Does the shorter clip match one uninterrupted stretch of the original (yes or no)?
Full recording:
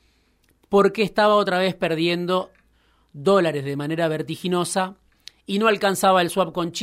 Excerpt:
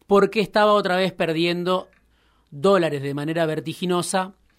yes